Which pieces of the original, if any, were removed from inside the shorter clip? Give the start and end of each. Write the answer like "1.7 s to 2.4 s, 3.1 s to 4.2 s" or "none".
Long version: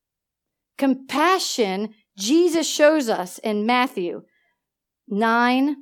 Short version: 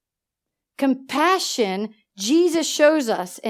none